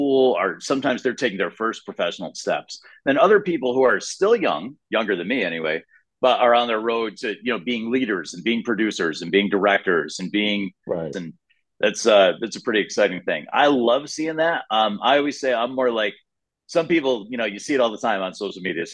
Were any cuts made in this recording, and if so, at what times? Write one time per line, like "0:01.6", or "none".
0:11.1